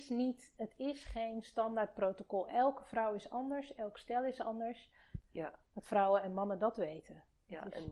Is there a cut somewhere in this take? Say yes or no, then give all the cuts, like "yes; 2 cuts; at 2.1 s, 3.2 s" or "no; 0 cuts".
yes; 1 cut; at 5.2 s